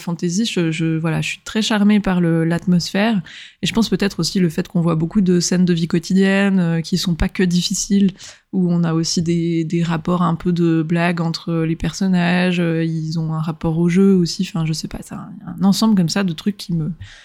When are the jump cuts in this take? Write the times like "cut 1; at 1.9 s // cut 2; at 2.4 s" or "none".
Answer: none